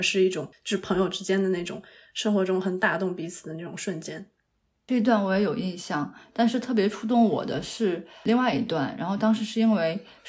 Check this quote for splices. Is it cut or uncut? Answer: uncut